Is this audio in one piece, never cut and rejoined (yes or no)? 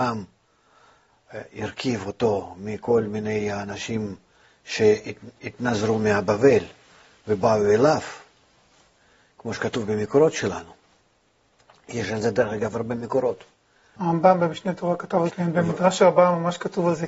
no